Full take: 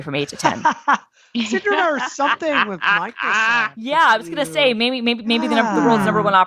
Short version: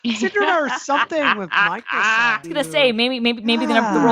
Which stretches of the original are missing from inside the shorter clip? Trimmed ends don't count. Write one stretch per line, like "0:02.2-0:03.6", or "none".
0:03.7-0:04.3